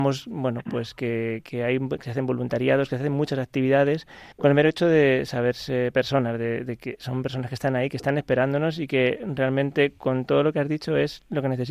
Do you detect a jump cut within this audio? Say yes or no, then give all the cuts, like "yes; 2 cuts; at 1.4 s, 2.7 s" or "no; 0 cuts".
yes; 1 cut; at 4.3 s